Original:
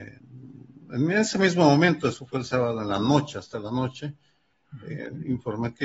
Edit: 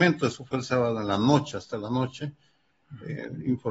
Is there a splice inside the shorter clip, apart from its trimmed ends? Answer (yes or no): no